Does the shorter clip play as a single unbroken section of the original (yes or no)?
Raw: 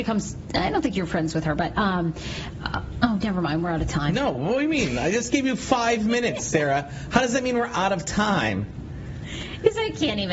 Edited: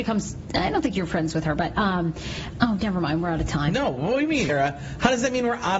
no